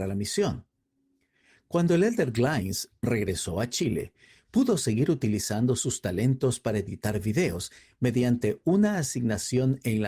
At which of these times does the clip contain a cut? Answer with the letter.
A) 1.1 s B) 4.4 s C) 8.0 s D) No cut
D